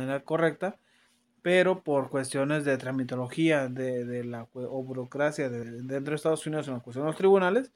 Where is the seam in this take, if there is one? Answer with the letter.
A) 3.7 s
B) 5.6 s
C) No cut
B